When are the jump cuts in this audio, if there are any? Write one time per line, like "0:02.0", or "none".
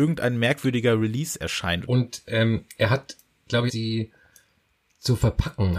0:01.8
0:03.7